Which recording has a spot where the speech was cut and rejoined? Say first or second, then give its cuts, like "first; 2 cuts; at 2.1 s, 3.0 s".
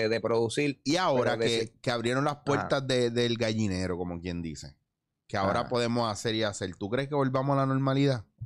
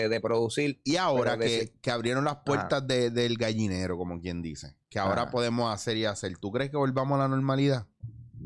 second; 1 cut; at 4.8 s